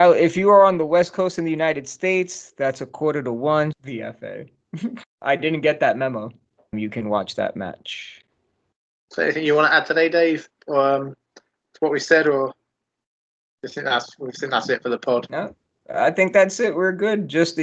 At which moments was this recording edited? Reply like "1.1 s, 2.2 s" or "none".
3.7 s, 5.0 s, 6.7 s